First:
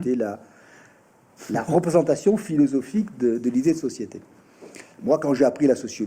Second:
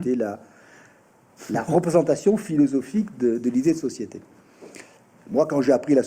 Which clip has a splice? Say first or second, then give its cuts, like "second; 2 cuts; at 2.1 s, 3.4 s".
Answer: first; 1 cut; at 4.9 s